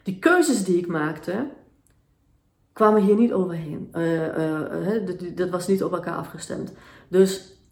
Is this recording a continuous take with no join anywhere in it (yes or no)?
yes